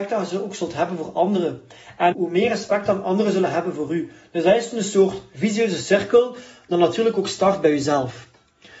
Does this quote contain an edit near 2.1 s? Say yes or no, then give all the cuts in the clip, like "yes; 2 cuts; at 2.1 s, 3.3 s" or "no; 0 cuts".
yes; 1 cut; at 2.1 s